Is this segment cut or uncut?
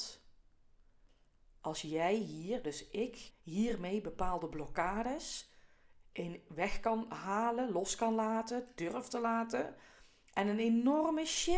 cut